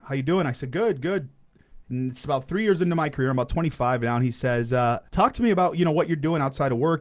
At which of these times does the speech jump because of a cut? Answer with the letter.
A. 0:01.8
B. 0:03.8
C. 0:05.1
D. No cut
C